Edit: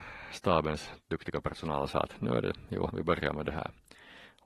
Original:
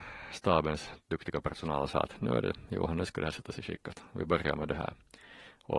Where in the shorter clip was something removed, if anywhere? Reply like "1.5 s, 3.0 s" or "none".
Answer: 2.9 s